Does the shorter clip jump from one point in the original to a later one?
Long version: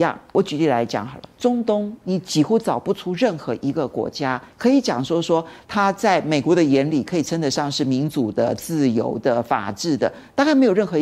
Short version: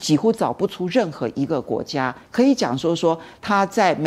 no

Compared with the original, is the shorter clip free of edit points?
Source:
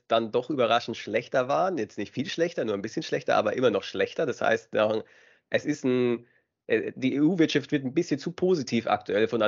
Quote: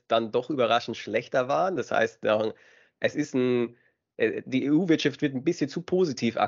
no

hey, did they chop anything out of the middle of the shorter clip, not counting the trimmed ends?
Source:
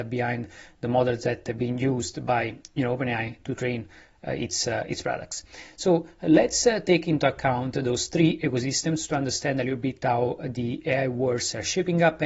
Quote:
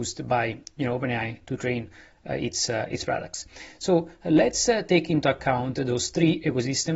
no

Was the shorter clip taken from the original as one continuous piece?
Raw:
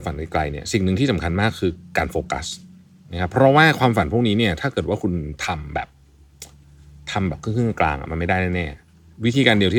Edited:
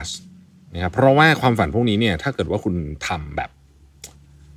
yes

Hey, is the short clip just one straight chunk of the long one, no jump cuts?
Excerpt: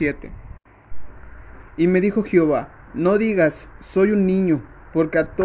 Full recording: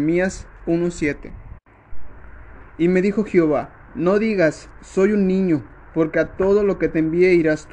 yes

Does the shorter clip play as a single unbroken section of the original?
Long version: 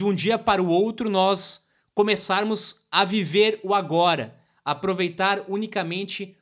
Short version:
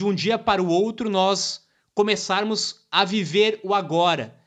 yes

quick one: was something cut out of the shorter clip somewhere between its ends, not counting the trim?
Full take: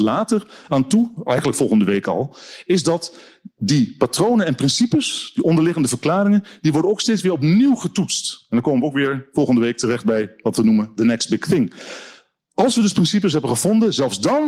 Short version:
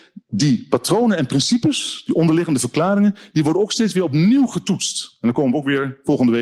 no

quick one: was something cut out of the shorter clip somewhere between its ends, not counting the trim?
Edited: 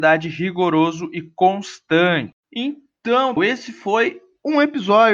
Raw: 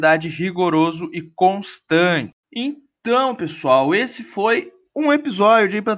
yes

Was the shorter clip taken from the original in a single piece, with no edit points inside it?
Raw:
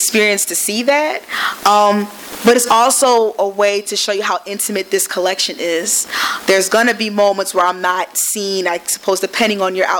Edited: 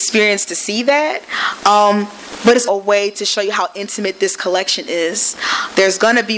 no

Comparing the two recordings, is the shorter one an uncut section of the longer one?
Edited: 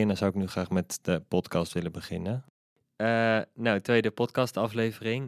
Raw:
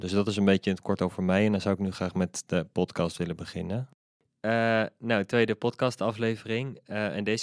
yes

